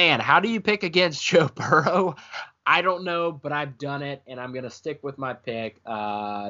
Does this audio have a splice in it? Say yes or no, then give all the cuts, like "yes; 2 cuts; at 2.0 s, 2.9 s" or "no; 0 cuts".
no; 0 cuts